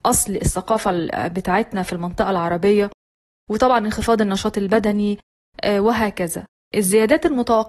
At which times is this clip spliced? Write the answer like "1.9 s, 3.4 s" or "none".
none